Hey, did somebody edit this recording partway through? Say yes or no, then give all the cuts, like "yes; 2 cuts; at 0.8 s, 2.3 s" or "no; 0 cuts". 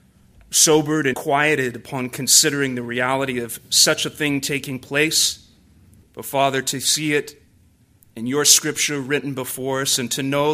yes; 2 cuts; at 1.1 s, 6.0 s